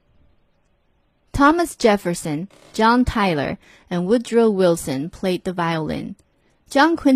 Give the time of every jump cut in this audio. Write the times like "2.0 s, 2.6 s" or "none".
none